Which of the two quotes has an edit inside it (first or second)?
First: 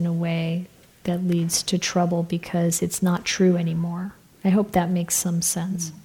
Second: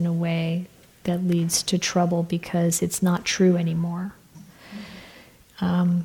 second